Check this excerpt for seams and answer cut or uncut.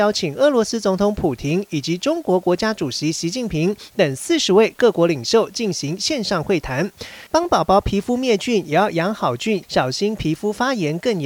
cut